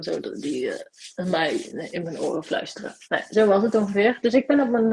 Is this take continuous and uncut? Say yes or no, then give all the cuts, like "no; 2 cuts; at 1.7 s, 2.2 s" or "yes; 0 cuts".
yes; 0 cuts